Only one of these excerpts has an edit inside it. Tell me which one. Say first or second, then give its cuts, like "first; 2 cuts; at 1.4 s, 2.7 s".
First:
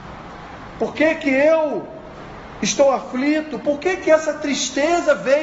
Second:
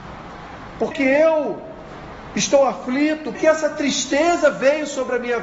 second; 2 cuts; at 0.9 s, 3.3 s